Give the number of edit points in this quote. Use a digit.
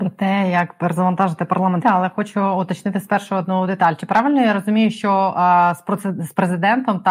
1